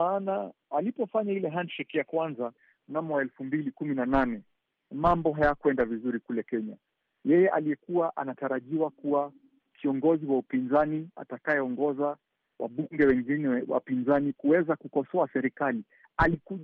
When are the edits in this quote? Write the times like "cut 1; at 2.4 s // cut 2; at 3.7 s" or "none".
none